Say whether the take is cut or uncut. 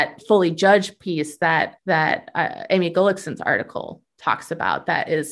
cut